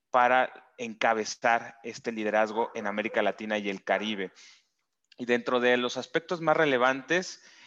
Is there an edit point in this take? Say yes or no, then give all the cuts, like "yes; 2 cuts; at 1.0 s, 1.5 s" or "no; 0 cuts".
no; 0 cuts